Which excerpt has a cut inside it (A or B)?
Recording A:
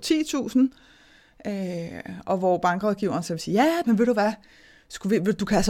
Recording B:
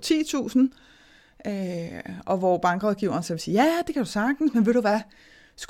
A